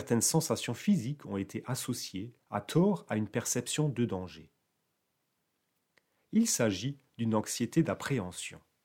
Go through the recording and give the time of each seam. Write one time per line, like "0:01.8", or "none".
0:02.4
0:06.2